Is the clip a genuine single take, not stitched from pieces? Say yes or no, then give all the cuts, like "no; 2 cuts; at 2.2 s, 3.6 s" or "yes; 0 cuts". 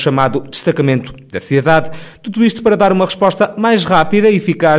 yes; 0 cuts